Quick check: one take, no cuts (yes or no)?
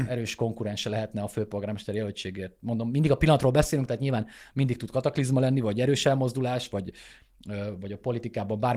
yes